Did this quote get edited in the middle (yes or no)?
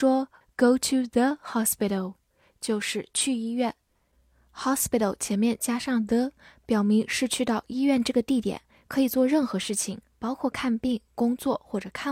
no